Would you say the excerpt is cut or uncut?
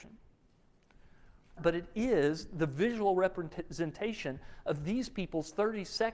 cut